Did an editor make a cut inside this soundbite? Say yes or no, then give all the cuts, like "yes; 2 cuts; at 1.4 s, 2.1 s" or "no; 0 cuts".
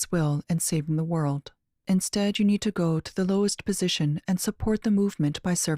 yes; 1 cut; at 1.8 s